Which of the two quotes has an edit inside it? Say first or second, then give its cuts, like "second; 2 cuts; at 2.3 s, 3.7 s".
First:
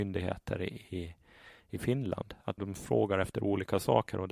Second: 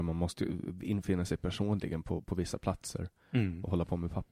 first; 1 cut; at 2.6 s